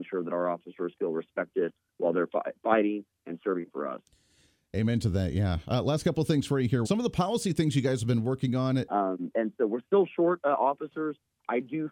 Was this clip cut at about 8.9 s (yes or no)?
yes